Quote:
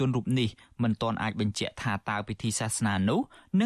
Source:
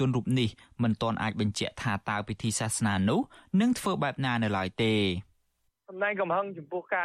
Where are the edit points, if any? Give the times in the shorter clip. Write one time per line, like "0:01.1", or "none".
none